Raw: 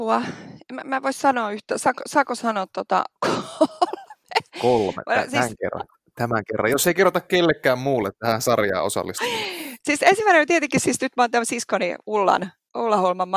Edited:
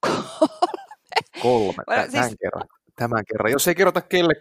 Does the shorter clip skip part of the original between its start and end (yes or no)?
no